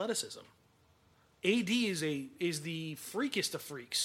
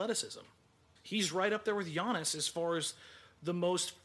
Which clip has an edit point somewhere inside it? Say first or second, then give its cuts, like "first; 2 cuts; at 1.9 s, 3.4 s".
second; 1 cut; at 1.0 s